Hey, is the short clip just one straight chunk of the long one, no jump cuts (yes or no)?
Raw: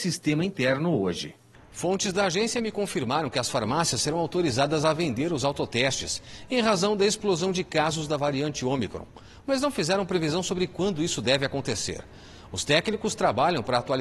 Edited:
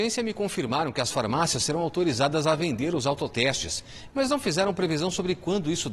no